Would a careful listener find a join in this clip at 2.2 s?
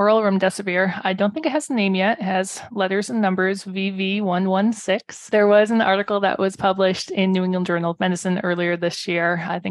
no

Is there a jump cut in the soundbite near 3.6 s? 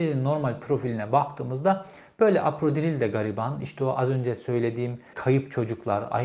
no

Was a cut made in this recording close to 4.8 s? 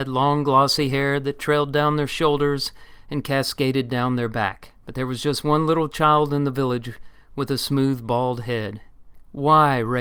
yes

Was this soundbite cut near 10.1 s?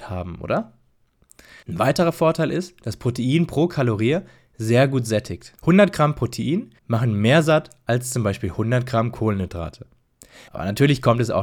no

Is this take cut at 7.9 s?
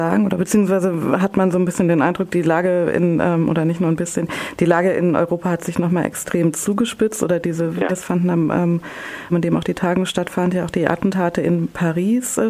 yes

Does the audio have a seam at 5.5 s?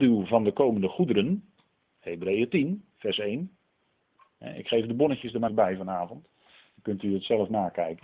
yes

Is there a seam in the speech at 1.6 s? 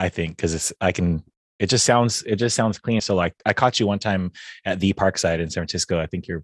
no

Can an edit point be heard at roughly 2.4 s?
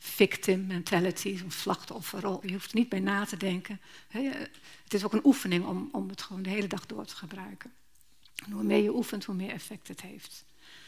yes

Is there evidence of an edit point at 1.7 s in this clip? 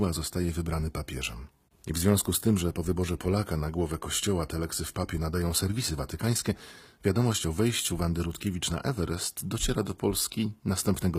yes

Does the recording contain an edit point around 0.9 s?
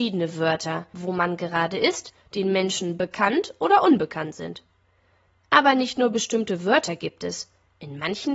yes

